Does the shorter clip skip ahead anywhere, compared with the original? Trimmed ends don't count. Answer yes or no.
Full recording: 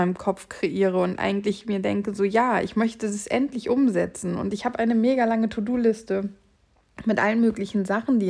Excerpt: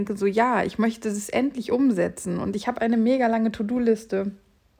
no